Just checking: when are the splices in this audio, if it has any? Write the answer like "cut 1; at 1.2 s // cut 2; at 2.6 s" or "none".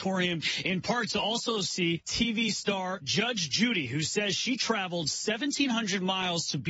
none